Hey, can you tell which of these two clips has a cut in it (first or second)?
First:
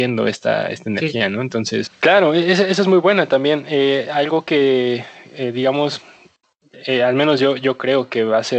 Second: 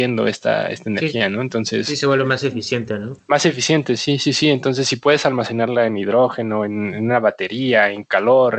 first